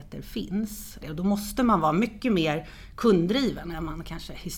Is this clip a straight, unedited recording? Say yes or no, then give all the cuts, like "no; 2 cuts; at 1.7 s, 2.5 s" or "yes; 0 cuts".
no; 1 cut; at 1.0 s